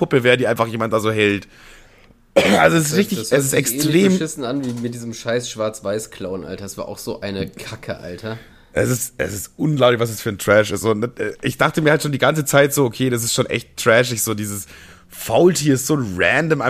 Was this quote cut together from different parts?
no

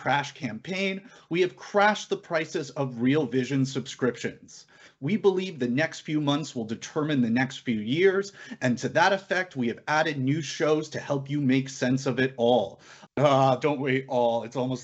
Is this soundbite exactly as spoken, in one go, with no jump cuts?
no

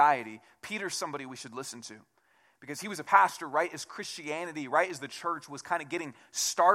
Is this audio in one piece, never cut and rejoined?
yes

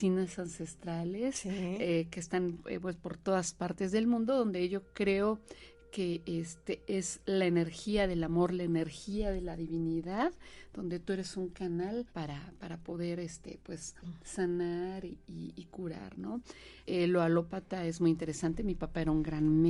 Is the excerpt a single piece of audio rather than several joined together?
no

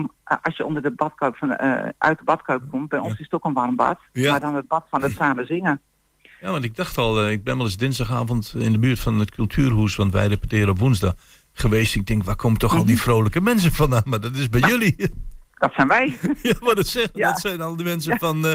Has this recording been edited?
no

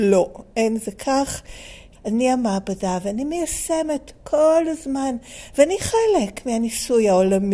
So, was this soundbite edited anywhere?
yes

